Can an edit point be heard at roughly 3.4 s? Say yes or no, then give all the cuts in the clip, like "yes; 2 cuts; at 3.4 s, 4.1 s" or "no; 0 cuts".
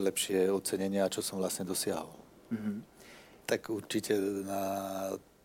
yes; 1 cut; at 3.4 s